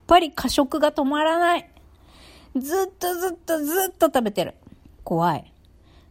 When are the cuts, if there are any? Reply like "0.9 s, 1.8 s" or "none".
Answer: 4.8 s